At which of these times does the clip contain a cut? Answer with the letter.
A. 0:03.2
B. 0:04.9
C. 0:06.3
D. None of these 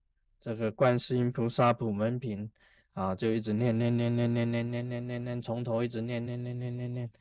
C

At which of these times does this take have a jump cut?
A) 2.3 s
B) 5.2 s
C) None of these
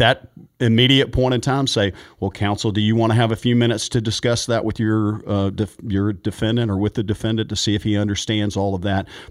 C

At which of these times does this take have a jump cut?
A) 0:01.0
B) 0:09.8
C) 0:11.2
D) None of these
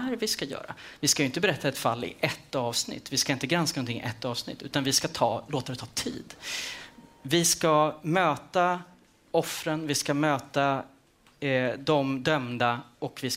D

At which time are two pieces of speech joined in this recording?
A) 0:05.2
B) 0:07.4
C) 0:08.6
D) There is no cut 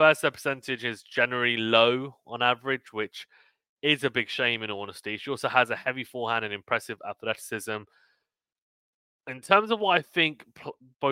D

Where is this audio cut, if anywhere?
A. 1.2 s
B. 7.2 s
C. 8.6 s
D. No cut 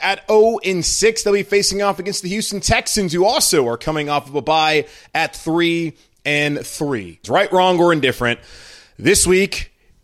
B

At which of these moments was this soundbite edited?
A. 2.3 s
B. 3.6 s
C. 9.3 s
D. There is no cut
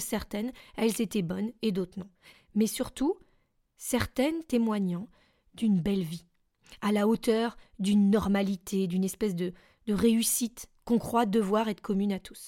A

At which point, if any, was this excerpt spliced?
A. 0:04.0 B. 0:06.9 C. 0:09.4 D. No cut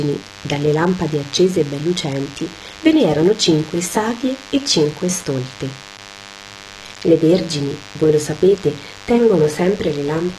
B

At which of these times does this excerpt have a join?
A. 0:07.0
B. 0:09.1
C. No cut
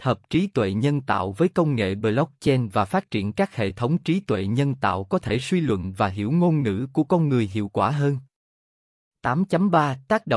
C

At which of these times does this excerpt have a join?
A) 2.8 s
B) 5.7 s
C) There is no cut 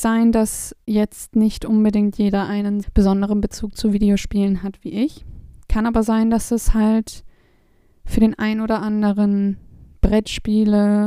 A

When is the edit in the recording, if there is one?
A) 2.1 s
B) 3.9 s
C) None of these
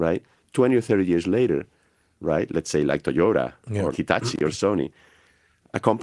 B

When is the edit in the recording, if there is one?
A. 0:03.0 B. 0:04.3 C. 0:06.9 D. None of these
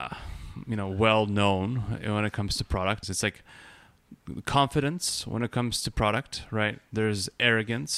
A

